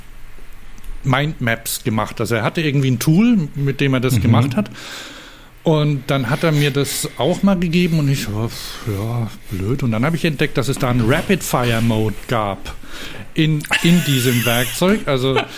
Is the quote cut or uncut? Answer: uncut